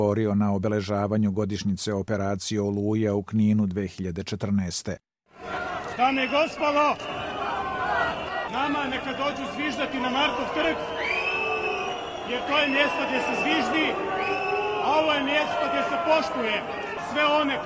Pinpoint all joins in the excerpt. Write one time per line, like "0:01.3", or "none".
0:08.5